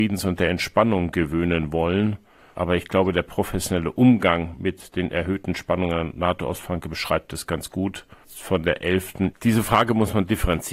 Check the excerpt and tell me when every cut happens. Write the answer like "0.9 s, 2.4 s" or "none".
9.3 s